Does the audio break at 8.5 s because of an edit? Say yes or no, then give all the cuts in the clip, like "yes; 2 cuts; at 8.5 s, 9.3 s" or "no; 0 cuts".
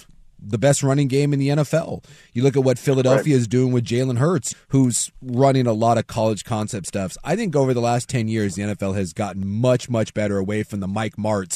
no; 1 cut; at 4.5 s